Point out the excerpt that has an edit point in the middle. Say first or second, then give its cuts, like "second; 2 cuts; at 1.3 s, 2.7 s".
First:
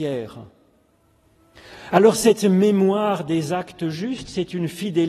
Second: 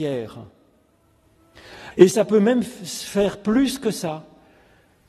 second; 1 cut; at 1.9 s